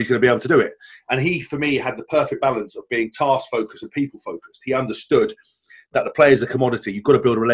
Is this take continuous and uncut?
yes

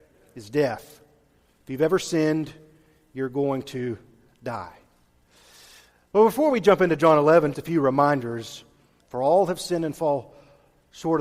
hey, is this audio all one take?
no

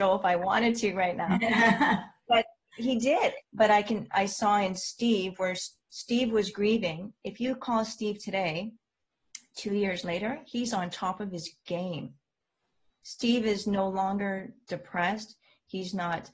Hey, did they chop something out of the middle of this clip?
yes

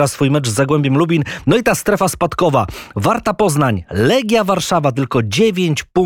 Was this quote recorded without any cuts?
yes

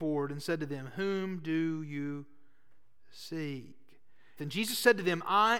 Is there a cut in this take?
yes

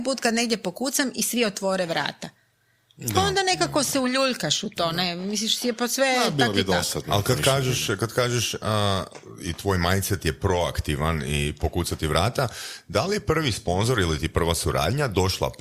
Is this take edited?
no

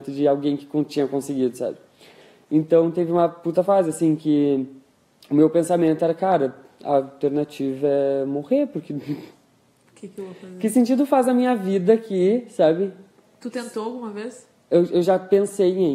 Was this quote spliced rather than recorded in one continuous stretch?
no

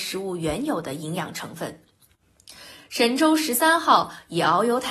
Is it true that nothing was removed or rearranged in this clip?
yes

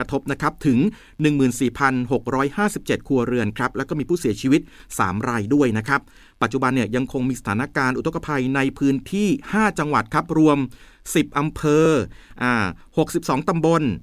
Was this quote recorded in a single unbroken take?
yes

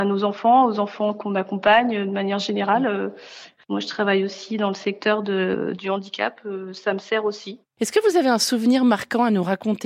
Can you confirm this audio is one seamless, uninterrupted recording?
yes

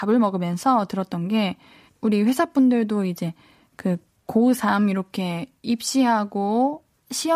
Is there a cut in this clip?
yes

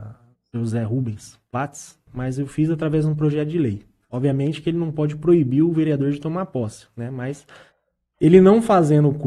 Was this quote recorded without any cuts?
no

